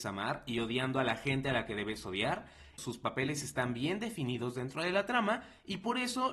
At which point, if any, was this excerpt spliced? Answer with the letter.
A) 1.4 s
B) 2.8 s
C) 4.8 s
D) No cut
B